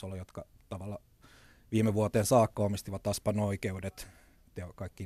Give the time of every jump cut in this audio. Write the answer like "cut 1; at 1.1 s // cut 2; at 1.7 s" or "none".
none